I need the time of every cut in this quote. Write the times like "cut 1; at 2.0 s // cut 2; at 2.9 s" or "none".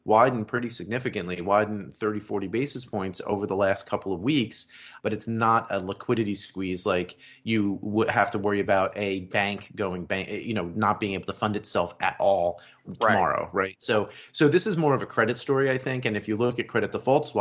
cut 1; at 5.0 s